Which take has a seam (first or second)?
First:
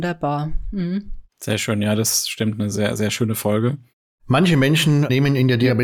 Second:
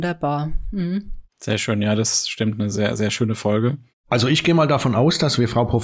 second